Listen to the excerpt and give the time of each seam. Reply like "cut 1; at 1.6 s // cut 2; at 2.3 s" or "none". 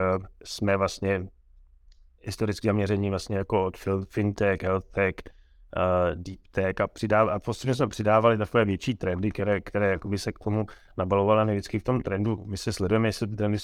none